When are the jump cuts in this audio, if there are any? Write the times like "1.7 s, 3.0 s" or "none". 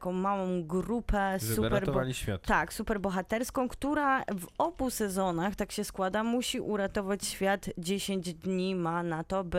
none